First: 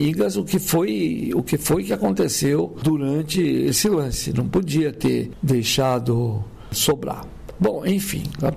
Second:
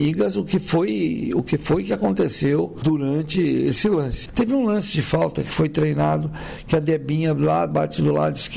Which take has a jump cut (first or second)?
second